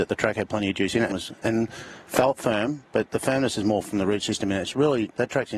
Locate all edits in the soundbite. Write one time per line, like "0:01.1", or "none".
0:01.1